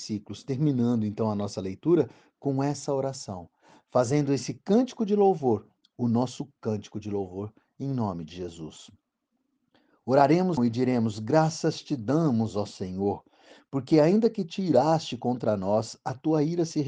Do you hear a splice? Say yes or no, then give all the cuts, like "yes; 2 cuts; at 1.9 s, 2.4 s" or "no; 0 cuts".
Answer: yes; 1 cut; at 10.6 s